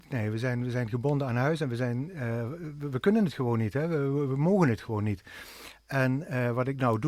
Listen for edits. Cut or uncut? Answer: uncut